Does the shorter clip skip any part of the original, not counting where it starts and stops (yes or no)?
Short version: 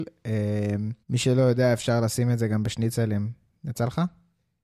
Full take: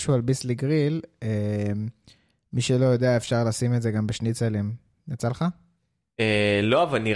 yes